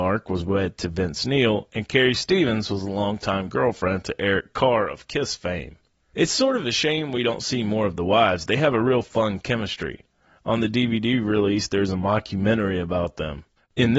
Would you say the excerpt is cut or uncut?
uncut